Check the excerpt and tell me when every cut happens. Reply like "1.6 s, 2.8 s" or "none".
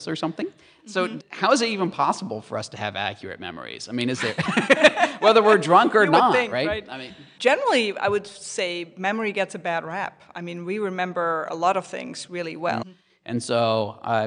12.8 s